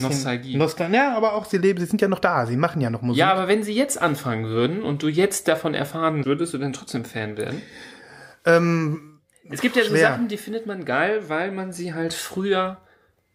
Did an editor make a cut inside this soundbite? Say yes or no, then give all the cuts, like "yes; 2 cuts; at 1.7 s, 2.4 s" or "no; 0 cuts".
yes; 1 cut; at 6.2 s